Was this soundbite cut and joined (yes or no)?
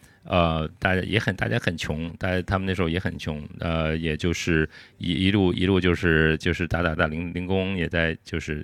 yes